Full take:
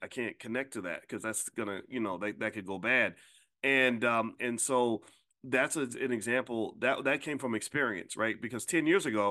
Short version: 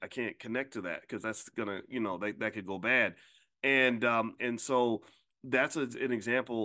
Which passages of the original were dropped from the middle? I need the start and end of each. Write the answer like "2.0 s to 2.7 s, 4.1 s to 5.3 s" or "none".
none